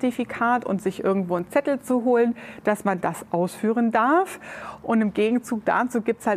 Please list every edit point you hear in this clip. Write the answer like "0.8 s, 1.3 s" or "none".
none